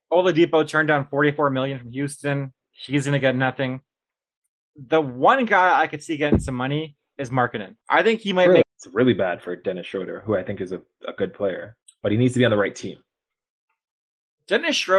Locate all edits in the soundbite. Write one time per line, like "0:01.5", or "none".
0:08.6